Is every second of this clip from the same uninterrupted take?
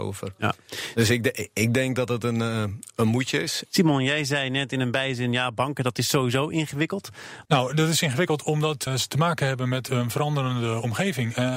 no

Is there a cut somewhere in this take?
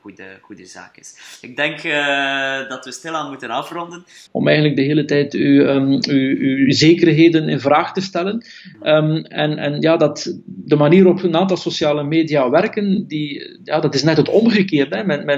yes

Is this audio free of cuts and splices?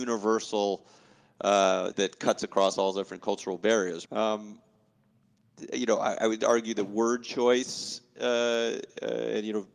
no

